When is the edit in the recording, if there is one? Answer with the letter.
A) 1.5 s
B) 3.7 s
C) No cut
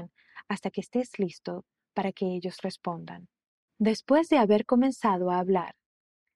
B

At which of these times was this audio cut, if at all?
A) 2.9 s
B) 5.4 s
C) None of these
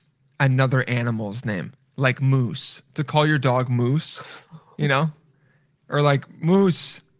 C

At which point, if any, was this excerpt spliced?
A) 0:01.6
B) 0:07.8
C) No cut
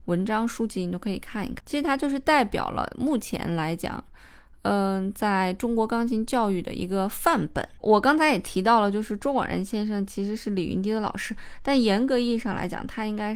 B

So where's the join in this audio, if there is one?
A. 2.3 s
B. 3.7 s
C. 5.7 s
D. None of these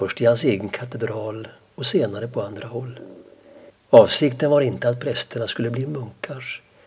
B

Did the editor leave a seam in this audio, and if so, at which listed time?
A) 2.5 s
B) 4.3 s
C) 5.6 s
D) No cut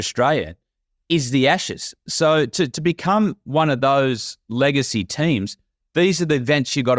D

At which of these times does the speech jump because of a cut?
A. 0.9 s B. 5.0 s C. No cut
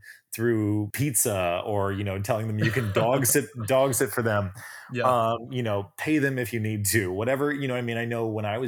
A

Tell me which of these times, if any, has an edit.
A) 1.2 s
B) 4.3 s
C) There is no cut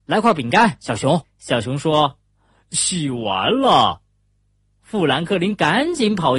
A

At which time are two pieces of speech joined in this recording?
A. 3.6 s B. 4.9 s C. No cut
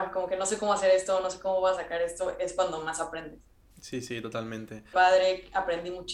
B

